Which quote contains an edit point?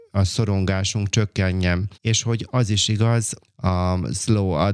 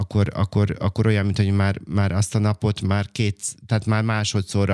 first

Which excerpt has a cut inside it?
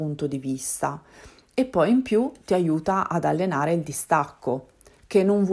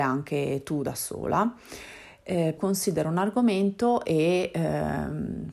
second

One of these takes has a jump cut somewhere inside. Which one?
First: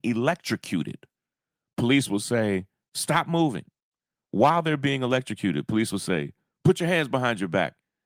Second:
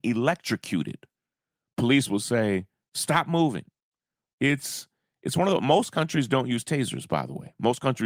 second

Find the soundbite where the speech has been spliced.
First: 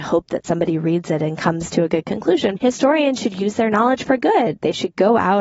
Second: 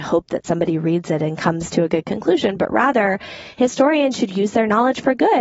first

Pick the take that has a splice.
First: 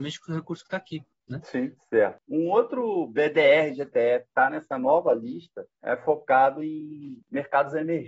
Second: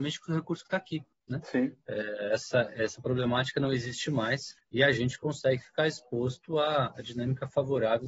first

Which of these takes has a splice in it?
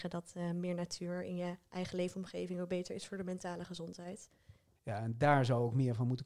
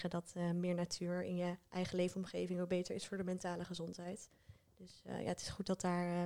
first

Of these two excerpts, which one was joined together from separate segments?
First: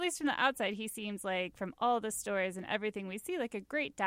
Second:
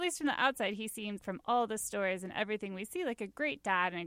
second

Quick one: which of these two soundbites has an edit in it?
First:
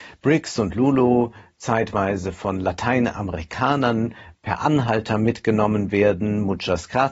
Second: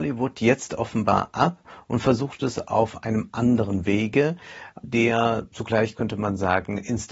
second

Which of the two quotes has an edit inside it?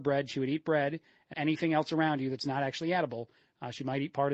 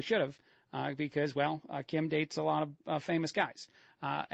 first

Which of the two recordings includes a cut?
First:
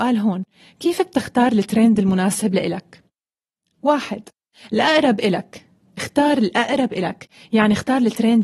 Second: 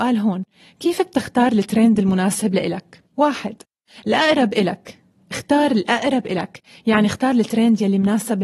second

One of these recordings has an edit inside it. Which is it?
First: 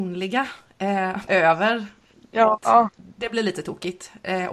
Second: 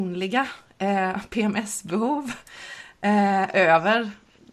first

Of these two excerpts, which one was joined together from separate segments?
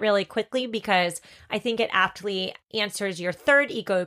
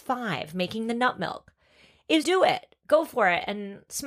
second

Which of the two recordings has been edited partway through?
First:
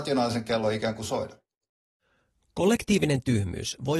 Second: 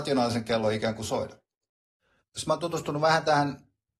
second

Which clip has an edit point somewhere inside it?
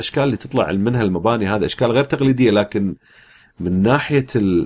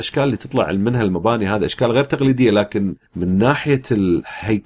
second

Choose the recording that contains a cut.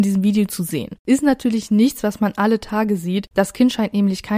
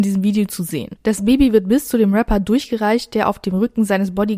first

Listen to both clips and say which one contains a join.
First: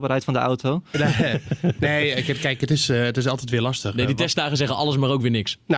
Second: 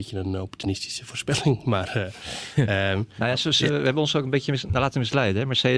first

